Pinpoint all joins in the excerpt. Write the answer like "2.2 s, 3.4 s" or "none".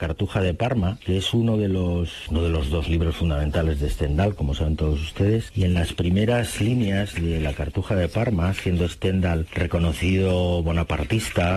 none